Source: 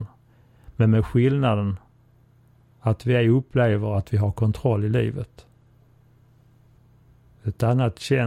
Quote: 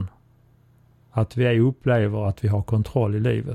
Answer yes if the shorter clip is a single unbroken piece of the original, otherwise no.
yes